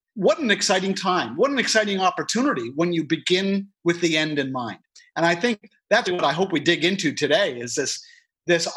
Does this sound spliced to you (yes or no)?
yes